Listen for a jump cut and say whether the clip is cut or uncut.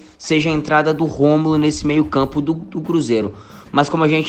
uncut